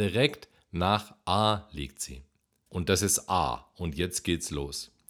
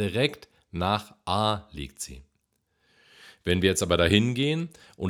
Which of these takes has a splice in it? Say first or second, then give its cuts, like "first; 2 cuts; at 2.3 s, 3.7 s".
first; 1 cut; at 2.7 s